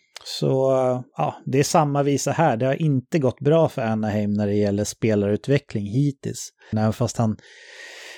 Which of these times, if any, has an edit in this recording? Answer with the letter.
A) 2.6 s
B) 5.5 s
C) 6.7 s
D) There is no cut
C